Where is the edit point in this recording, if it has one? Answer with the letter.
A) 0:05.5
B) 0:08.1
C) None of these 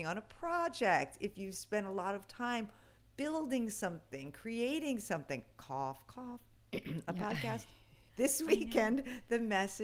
B